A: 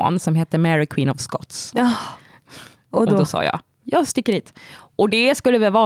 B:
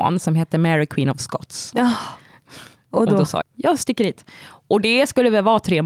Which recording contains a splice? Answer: B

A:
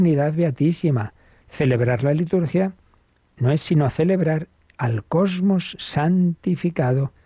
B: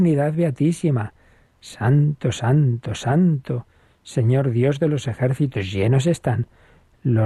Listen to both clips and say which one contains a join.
A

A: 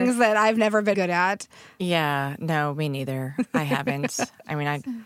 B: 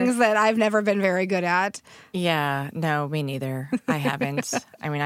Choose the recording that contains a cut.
A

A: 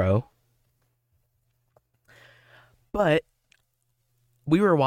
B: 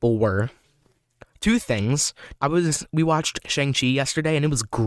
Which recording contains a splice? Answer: B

